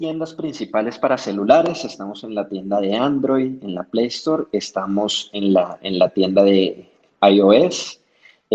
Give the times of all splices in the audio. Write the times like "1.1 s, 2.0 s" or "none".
none